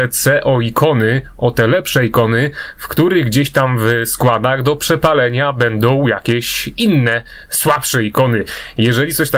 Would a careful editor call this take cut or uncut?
uncut